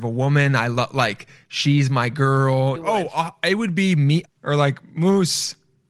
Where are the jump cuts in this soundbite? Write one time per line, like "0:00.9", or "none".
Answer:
0:02.8
0:04.3

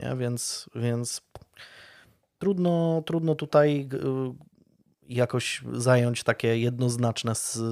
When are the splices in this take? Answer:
none

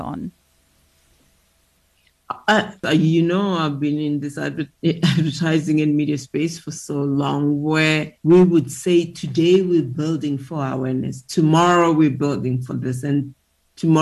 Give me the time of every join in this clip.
0:02.8
0:08.2

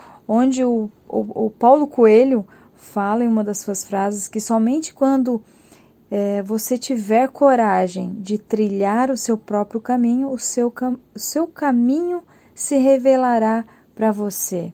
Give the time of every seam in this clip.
none

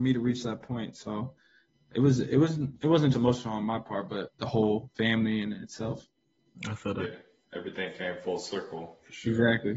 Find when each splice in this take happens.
0:03.1

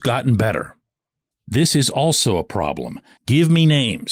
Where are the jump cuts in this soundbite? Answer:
0:01.3
0:03.2

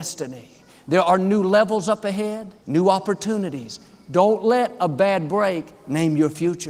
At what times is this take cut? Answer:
0:02.6

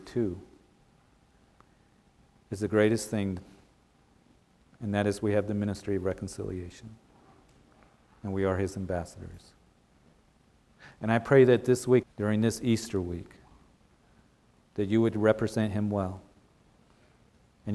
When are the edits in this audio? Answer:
0:12.0

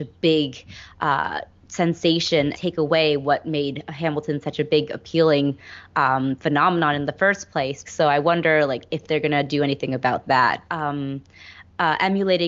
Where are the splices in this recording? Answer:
0:02.5
0:07.9
0:10.7

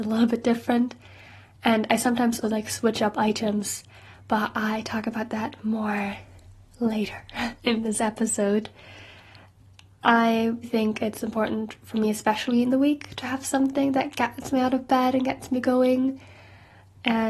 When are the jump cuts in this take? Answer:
0:02.4
0:10.6

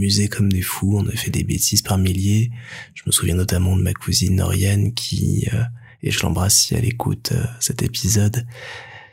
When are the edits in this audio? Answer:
none

